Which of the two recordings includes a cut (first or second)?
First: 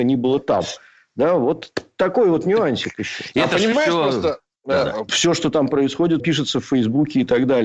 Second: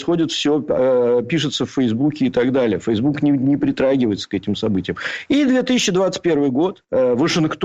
first